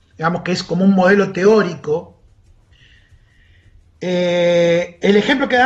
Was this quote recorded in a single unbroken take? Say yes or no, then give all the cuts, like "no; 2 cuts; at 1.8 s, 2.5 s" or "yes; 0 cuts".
yes; 0 cuts